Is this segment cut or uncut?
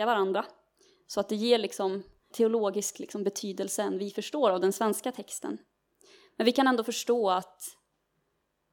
cut